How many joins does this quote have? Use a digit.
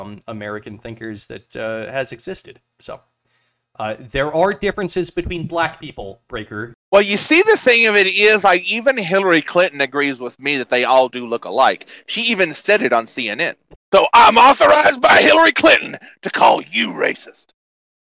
2